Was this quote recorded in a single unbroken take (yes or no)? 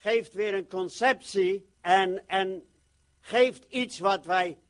no